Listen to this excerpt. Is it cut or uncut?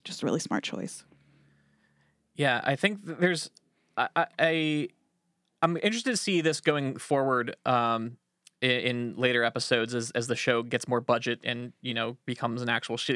uncut